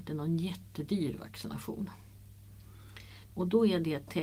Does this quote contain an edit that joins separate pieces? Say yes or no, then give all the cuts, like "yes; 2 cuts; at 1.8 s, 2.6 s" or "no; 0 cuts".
yes; 1 cut; at 3.3 s